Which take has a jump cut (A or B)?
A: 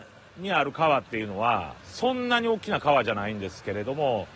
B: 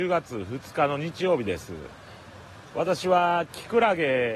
A